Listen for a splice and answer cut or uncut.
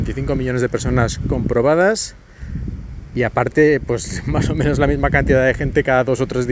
uncut